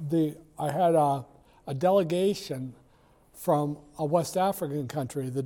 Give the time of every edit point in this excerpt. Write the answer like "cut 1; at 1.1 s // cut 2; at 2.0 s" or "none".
none